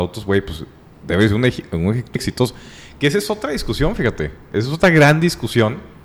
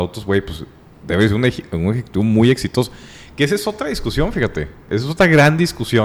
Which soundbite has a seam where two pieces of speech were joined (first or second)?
first